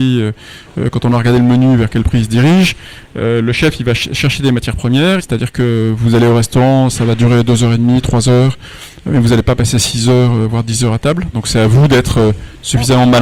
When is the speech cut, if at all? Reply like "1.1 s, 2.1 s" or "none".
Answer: 5.2 s, 11.3 s